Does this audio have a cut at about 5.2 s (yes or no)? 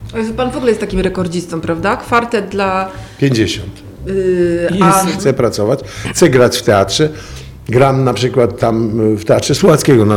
yes